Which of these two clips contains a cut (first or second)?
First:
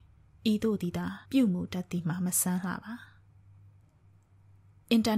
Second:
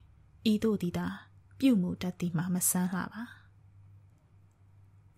first